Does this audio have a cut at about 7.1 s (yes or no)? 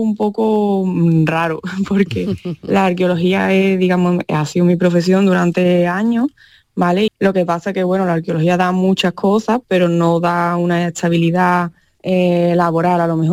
yes